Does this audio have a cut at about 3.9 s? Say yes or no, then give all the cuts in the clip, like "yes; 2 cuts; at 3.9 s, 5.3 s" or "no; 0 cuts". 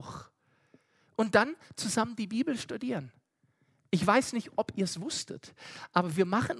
no; 0 cuts